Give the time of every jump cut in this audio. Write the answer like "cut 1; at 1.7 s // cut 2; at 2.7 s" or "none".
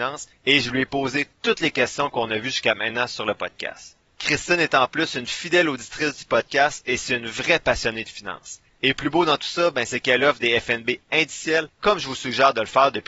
cut 1; at 8.7 s